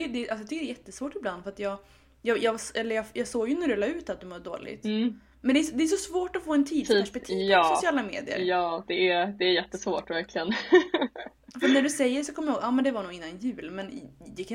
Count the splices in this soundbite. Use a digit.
0